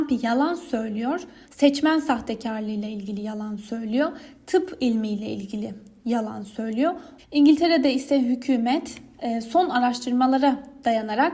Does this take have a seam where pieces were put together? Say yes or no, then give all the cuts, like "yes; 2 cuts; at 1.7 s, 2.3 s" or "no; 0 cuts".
yes; 2 cuts; at 1.4 s, 7.2 s